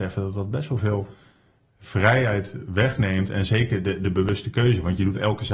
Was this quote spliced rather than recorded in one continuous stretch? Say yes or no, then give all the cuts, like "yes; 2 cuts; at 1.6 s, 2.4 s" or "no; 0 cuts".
no; 0 cuts